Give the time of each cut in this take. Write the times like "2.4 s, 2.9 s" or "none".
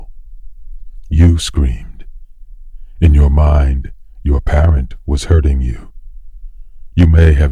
1.1 s